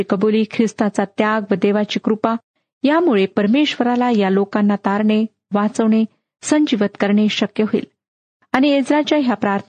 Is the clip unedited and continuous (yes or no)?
yes